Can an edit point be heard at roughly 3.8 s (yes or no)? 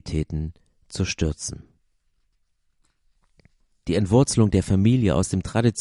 yes